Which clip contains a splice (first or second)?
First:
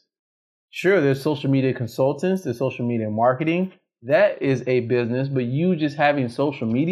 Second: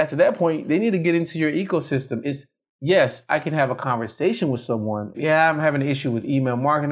second